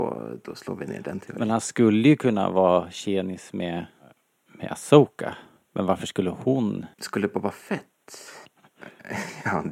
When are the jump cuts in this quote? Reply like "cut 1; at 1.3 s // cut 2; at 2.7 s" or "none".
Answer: cut 1; at 6.9 s // cut 2; at 8.5 s